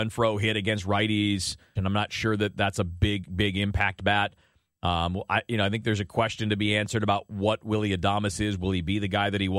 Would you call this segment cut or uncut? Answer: cut